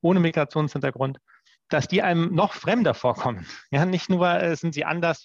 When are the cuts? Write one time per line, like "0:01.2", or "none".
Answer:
none

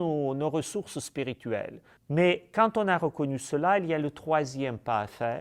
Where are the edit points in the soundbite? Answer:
none

